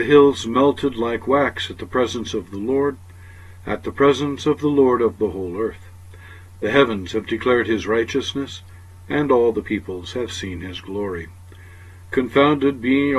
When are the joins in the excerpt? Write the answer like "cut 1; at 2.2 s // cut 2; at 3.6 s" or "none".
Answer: none